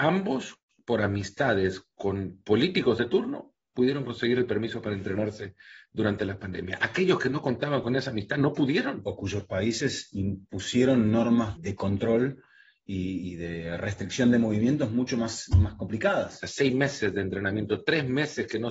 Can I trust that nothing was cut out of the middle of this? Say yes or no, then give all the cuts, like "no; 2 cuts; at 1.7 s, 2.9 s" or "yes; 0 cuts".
no; 2 cuts; at 11.5 s, 16.4 s